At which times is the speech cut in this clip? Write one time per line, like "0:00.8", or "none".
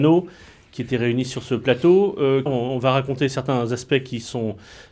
0:02.5